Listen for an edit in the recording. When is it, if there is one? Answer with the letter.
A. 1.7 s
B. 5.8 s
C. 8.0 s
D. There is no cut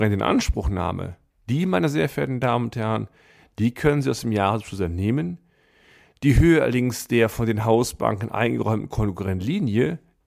D